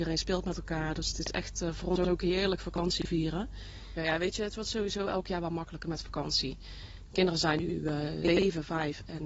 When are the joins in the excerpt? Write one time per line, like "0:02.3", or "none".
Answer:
0:04.0